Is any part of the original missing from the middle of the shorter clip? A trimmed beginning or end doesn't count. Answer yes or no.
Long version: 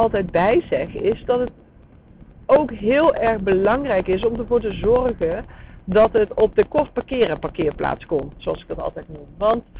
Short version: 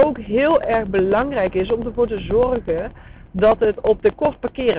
no